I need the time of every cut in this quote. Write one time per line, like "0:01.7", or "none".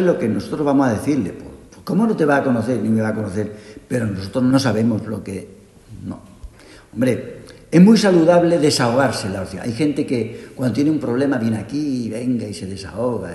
none